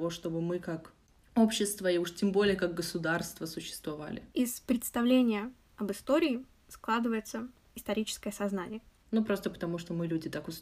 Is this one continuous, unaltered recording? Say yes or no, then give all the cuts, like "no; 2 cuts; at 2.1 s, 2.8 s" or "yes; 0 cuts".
no; 2 cuts; at 4.3 s, 9.0 s